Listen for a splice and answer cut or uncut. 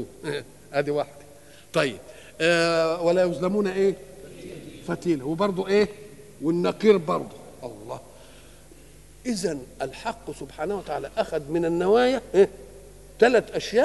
uncut